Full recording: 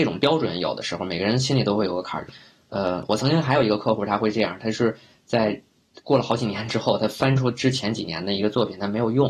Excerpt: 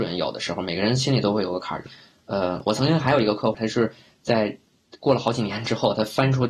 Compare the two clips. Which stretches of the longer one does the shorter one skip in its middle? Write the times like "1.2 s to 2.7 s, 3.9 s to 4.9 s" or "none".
4.0 s to 4.6 s